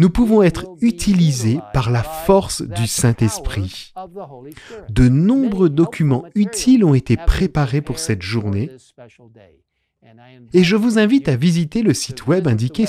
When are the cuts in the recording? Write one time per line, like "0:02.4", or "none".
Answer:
none